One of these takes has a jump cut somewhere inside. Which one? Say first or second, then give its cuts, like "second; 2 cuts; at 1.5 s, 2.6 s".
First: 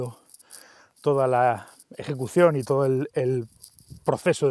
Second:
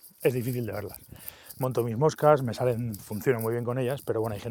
second; 2 cuts; at 1.5 s, 3.0 s